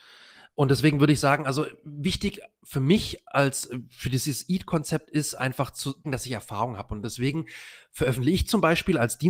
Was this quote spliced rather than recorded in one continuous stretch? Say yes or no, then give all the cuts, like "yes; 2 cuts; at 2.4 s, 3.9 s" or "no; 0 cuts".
yes; 1 cut; at 6.0 s